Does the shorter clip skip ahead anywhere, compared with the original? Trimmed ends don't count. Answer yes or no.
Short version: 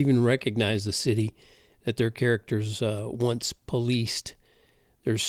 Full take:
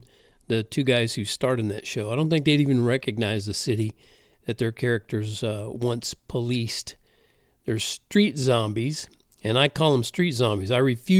no